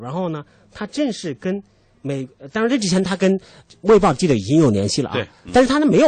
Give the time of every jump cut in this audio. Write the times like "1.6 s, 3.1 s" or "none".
none